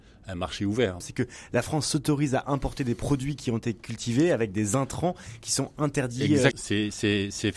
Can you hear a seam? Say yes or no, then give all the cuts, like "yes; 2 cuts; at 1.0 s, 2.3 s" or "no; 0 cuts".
yes; 2 cuts; at 1.0 s, 6.5 s